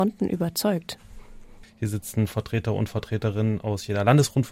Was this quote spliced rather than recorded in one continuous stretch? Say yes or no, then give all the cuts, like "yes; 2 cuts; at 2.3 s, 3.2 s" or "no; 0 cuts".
yes; 1 cut; at 1.6 s